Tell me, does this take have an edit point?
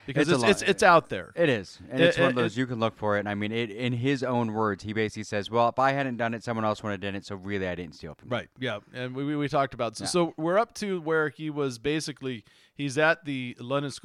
no; 0 cuts

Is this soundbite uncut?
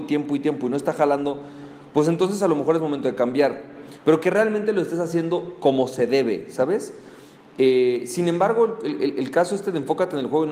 yes; 0 cuts

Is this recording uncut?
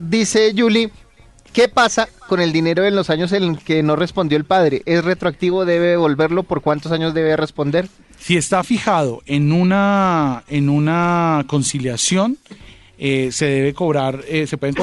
yes; 0 cuts

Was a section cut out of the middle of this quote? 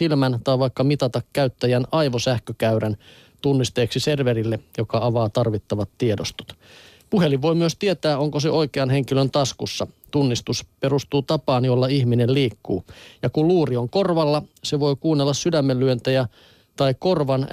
no; 0 cuts

